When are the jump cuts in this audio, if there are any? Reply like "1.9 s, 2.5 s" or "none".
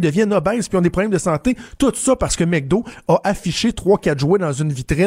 none